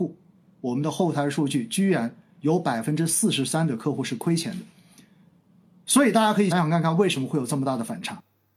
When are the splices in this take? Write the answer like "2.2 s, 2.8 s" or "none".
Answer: 6.5 s